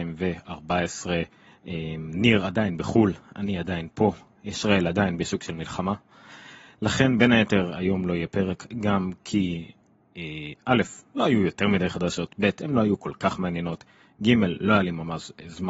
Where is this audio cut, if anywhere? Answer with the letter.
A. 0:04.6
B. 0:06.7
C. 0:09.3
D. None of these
D